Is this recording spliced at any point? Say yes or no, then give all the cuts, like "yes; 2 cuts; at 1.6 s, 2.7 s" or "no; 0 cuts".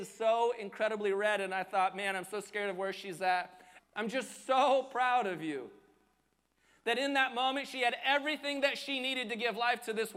yes; 1 cut; at 3.8 s